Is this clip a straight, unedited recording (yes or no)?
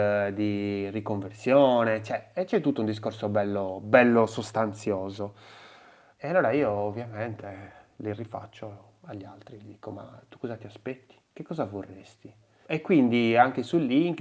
no